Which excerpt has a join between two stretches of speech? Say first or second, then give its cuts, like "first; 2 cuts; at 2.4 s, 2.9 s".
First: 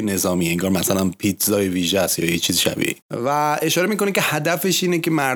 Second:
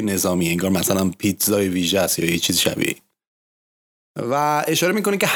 first; 1 cut; at 3.0 s